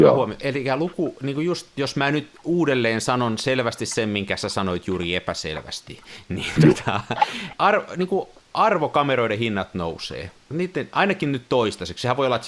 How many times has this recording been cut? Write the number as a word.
two